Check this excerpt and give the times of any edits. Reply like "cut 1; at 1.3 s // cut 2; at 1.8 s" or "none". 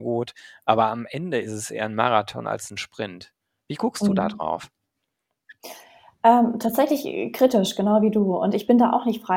none